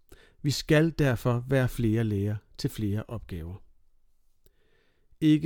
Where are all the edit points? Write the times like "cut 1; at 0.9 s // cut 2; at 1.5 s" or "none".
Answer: none